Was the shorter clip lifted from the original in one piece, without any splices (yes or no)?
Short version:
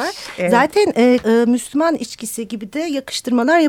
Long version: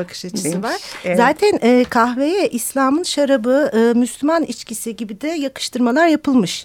no